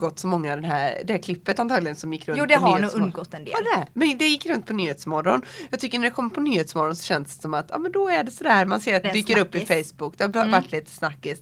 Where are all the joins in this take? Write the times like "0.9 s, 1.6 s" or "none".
9.0 s